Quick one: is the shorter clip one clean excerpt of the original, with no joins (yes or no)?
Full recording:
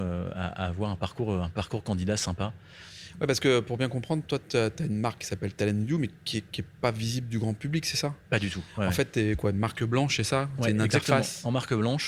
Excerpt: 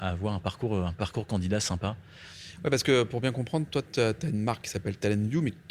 yes